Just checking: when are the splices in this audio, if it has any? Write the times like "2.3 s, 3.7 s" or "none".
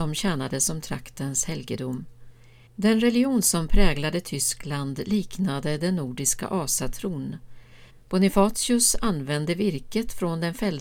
2.7 s, 7.9 s

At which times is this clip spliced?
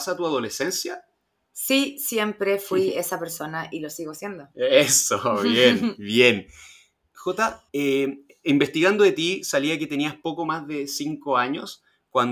7.7 s

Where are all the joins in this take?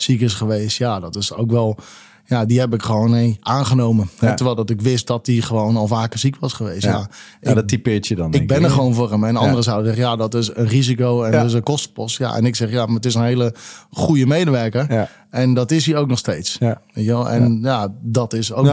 none

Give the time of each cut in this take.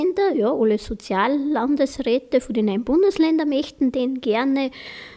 none

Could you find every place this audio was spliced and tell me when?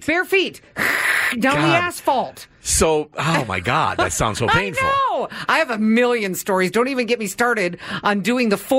none

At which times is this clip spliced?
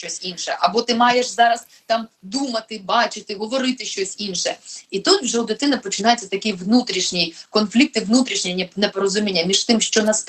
none

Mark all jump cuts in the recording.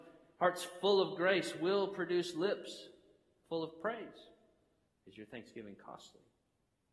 4.9 s

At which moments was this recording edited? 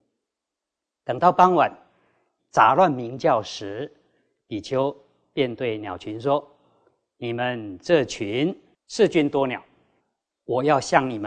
2.4 s

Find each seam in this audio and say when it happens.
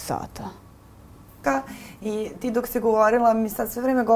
1.4 s

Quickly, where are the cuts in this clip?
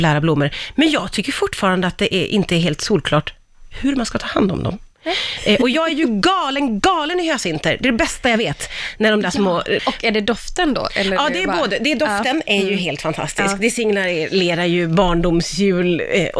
9.8 s

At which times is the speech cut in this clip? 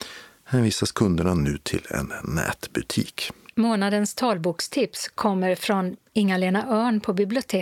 none

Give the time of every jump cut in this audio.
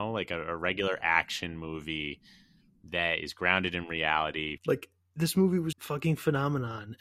4.6 s, 5.7 s

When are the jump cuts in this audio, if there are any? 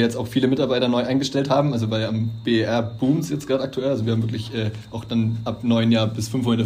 none

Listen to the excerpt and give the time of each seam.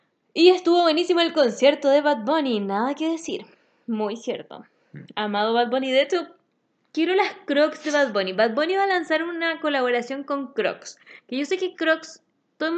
none

